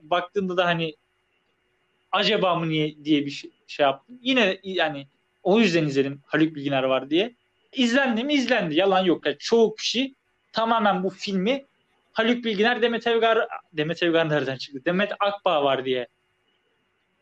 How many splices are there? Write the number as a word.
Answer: one